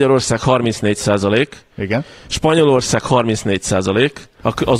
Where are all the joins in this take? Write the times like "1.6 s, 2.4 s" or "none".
none